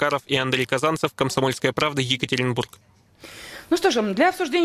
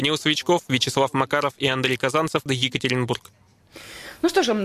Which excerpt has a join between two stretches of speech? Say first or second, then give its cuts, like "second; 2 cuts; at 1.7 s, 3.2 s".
second; 1 cut; at 2.5 s